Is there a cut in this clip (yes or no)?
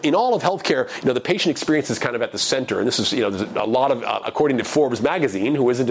yes